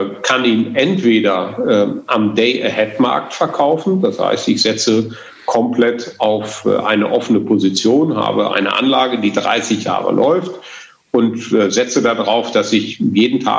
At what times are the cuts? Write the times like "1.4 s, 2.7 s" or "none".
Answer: 8.5 s